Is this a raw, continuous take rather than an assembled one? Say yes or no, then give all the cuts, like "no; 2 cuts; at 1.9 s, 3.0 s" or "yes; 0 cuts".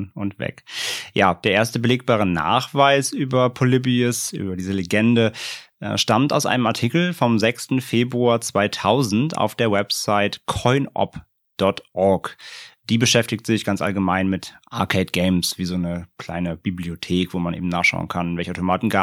yes; 0 cuts